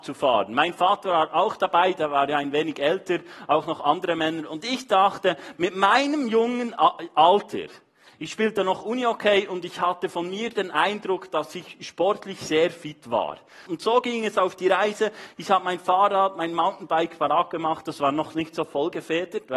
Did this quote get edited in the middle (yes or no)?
yes